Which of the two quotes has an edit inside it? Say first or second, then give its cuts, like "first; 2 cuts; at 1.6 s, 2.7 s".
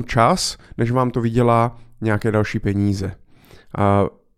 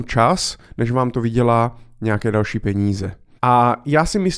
second; 1 cut; at 3.4 s